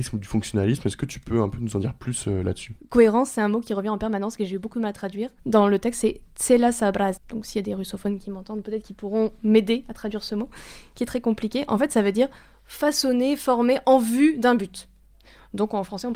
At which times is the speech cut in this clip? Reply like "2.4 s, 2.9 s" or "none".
7.2 s